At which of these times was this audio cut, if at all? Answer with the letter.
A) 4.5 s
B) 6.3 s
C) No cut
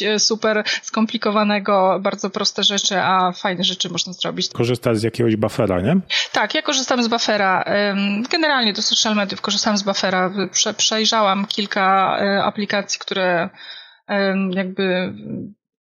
A